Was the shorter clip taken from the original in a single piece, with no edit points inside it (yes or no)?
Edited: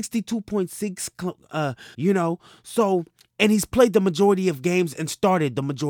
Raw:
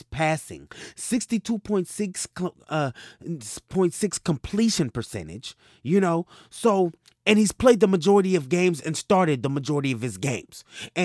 no